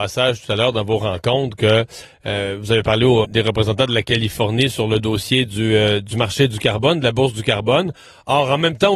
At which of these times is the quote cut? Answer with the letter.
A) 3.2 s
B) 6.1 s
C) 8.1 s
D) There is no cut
A